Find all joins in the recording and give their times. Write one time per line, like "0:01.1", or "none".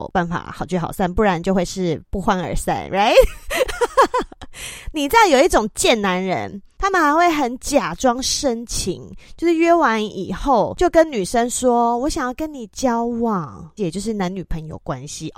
0:13.8